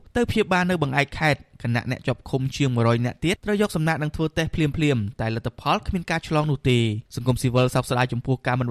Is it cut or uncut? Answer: cut